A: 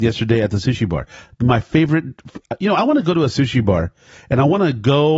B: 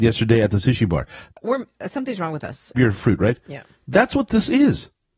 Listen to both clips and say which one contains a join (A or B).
B